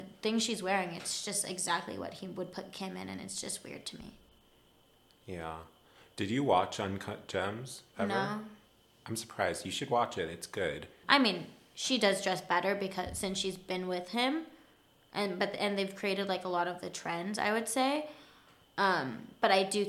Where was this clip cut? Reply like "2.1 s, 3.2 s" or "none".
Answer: 11.0 s